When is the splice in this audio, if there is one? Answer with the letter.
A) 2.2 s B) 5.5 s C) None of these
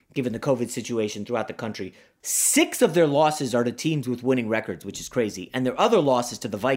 A